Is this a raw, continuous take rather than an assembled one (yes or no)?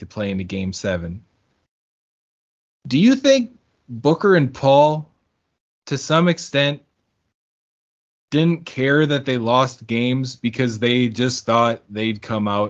yes